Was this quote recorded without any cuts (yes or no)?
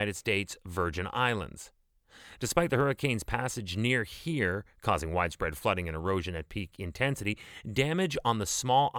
yes